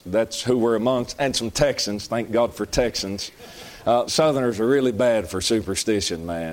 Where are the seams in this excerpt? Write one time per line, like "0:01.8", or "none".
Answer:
0:04.1